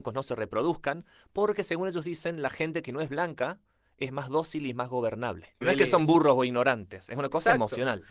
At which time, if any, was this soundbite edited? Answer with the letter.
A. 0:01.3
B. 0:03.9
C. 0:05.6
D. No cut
C